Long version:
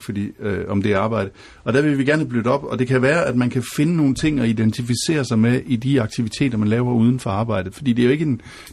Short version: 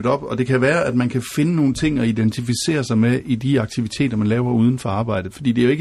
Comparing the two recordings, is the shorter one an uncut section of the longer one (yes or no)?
yes